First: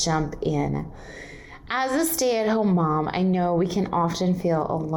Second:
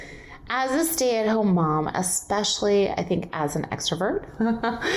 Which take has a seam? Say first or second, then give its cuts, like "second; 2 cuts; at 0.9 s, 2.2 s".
second; 1 cut; at 1.9 s